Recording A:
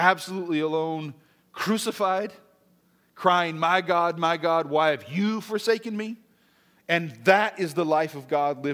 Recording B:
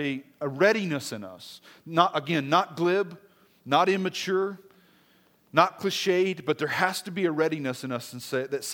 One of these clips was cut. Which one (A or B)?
A